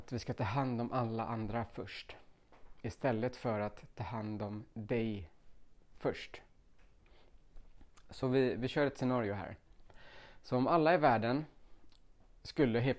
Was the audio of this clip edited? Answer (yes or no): no